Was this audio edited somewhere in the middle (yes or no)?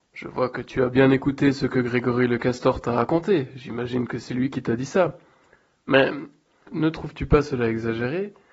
no